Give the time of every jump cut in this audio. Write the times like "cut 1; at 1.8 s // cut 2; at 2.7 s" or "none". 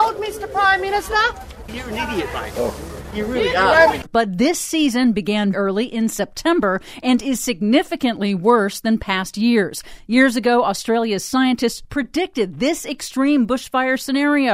cut 1; at 4.0 s // cut 2; at 5.5 s